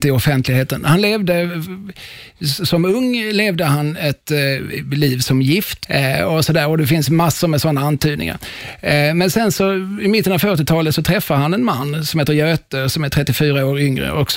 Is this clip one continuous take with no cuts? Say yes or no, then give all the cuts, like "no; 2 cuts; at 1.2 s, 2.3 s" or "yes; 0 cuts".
no; 1 cut; at 5.8 s